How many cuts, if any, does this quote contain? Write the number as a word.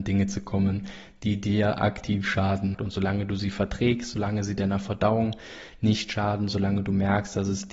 one